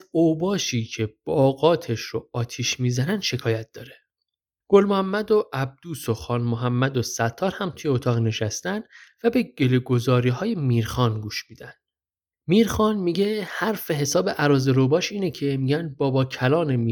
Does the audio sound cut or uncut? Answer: uncut